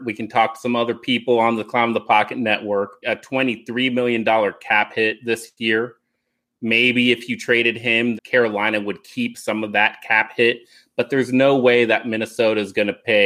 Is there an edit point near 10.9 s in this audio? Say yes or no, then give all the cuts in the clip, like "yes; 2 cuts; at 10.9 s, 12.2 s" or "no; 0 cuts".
no; 2 cuts; at 3.0 s, 8.2 s